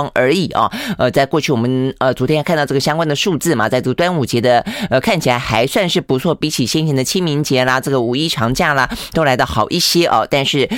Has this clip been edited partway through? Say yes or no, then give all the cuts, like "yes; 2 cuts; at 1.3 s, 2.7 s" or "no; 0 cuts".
no; 0 cuts